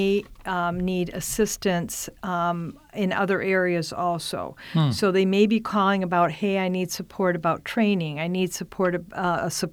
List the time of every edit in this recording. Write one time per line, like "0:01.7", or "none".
none